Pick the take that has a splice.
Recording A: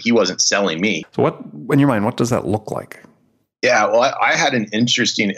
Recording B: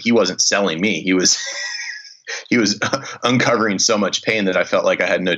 A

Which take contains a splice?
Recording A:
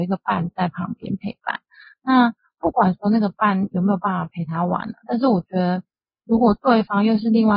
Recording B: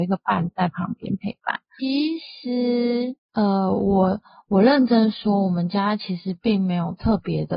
B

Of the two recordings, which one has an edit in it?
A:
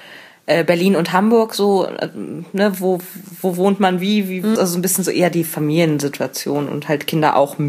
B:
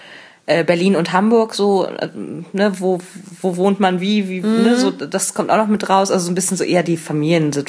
A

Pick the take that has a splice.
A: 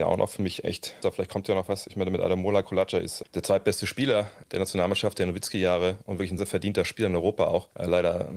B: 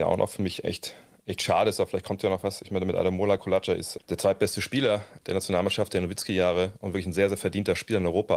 A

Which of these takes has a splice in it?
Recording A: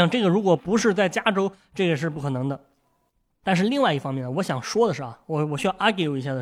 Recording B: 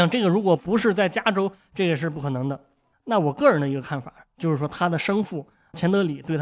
B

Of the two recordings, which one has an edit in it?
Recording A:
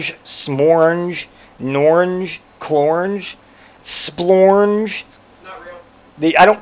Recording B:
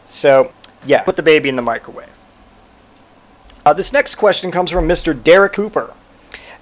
A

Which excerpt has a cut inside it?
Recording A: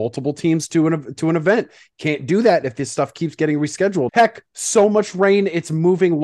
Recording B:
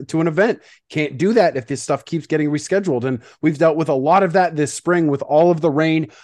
A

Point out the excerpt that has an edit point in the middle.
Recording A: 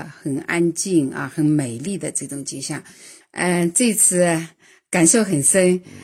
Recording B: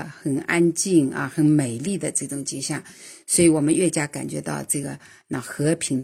A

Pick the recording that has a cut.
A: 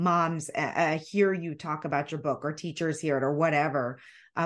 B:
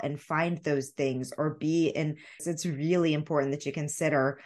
B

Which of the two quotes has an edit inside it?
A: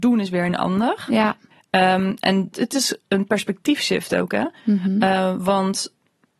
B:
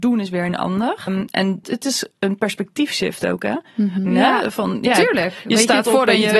B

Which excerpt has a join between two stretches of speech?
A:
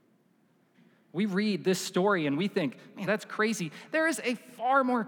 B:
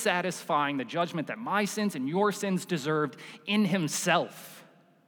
A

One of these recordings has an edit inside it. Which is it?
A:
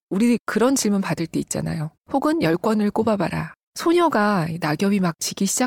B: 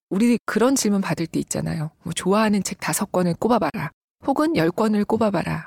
A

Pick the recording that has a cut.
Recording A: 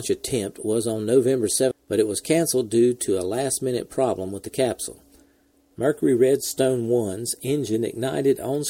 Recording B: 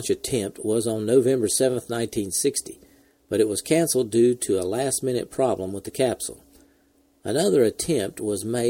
A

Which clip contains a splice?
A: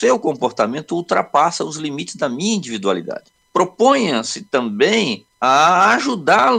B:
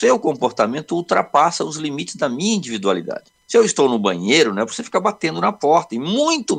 A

